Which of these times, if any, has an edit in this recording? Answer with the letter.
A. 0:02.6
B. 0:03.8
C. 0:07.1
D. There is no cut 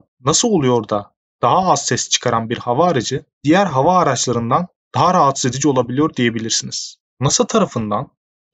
C